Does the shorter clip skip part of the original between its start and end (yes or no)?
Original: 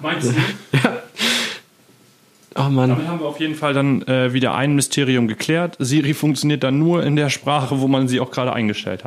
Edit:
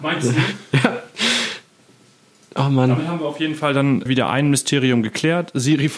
yes